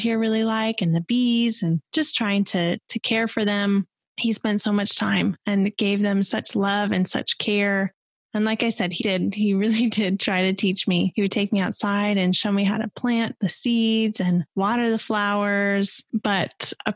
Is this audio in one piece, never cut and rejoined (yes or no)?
no